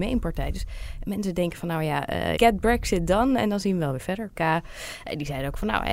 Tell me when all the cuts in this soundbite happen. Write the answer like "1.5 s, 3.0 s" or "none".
2.4 s, 4.4 s